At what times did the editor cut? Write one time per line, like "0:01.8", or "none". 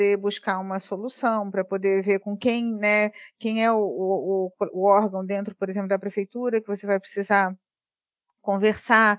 none